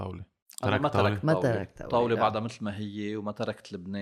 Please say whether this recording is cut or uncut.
uncut